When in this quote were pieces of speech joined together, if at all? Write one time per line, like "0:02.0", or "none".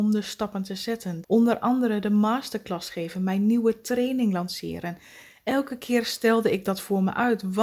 0:01.2